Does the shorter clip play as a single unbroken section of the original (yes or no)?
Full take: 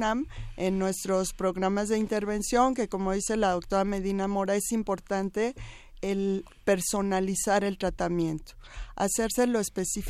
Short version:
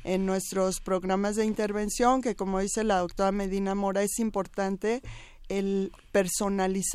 yes